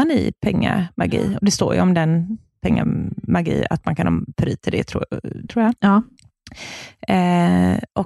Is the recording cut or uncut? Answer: cut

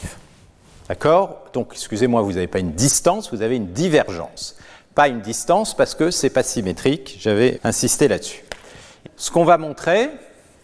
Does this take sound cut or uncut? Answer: cut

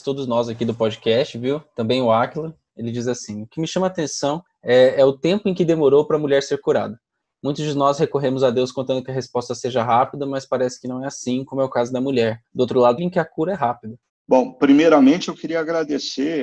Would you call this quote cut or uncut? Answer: cut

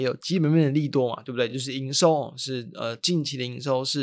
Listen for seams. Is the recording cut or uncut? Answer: uncut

